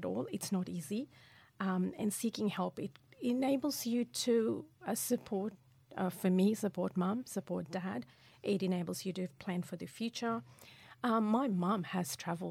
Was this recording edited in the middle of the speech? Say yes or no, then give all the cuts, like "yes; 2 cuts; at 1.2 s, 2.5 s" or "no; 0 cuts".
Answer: no; 0 cuts